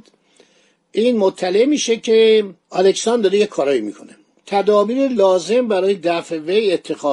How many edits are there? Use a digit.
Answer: 1